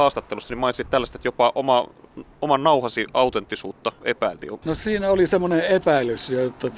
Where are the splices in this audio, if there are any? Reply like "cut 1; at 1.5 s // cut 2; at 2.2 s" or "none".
cut 1; at 4.6 s